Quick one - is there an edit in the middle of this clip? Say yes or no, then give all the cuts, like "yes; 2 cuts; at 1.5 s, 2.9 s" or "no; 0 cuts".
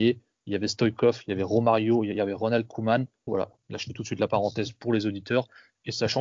yes; 1 cut; at 3.3 s